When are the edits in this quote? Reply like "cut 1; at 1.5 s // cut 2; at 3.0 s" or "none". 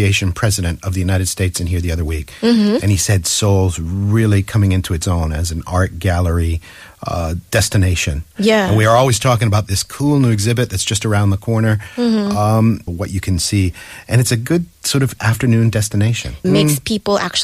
cut 1; at 12.9 s // cut 2; at 16.4 s